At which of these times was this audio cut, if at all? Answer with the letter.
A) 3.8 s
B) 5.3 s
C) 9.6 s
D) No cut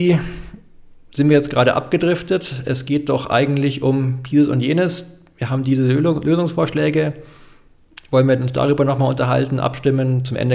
D